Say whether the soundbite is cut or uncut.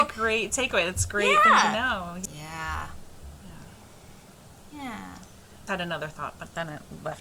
cut